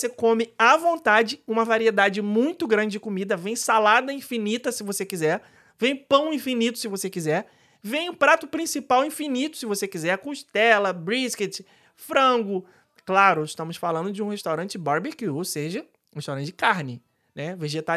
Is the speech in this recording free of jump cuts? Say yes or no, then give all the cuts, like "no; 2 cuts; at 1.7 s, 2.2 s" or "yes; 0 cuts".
yes; 0 cuts